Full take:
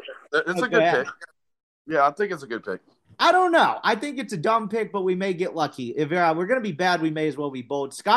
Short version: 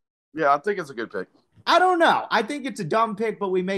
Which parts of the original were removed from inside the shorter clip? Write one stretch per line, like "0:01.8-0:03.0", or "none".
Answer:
none

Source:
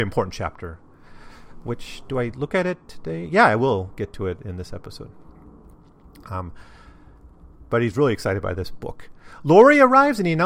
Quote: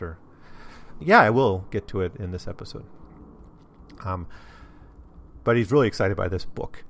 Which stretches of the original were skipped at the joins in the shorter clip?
0:01.6-0:03.3

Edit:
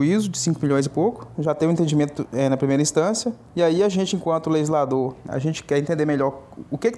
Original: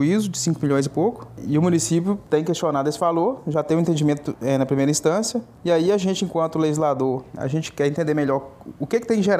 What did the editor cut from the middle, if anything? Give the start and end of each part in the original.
0:01.3-0:03.4

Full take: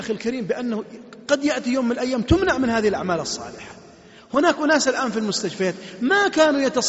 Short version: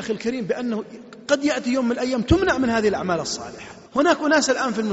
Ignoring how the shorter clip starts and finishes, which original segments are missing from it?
0:03.9-0:04.2

